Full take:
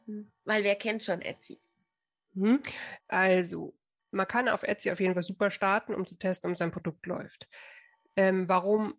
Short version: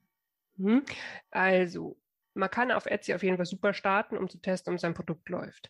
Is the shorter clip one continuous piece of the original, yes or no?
yes